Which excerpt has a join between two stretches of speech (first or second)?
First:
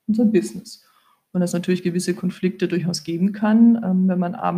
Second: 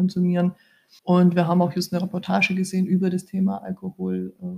second